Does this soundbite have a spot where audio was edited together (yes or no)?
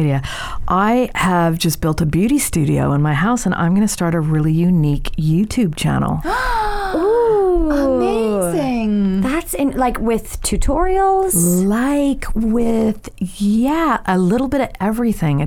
no